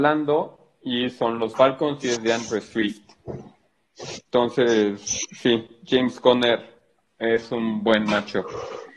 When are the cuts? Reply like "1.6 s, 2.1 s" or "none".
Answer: 4.3 s